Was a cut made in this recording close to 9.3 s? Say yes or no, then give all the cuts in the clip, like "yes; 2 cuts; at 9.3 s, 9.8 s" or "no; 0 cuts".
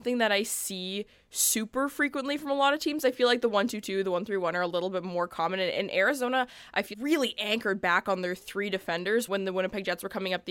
yes; 2 cuts; at 6.9 s, 9.3 s